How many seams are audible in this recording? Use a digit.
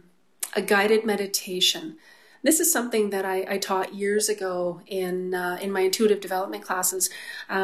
0